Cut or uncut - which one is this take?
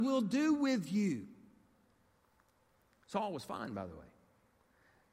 uncut